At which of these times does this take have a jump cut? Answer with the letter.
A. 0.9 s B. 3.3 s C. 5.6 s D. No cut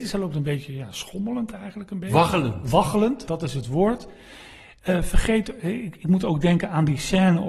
B